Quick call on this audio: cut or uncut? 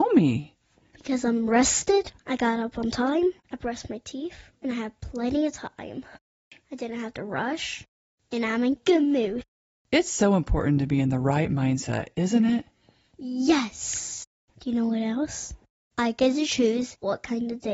cut